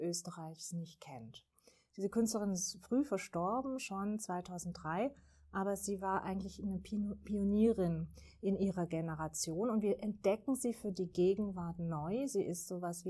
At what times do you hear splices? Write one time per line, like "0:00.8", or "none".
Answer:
none